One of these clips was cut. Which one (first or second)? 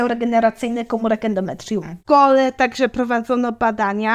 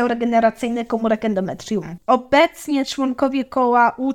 second